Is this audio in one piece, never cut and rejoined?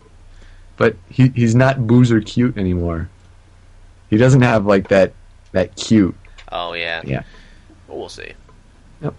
no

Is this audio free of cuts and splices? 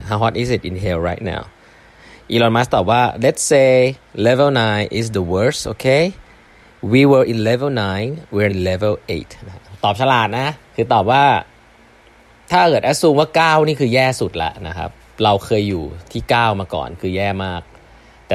no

